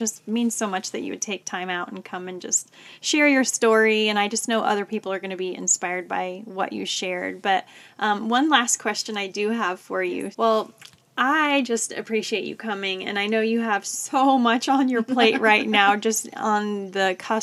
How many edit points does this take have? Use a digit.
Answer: 1